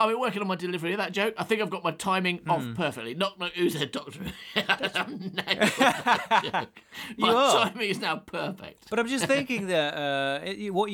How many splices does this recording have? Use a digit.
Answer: 0